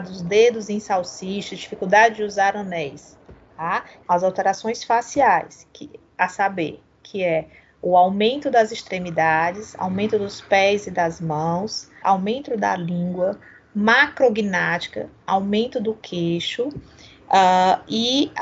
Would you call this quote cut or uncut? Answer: cut